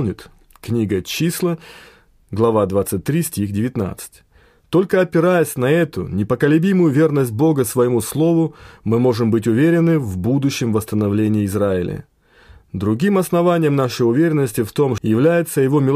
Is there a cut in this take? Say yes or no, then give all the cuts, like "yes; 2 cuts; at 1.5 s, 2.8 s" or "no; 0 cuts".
yes; 1 cut; at 15.0 s